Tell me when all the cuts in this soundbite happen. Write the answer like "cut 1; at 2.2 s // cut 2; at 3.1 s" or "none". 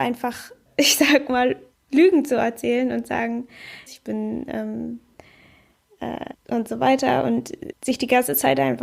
cut 1; at 3.9 s // cut 2; at 6.3 s // cut 3; at 7.7 s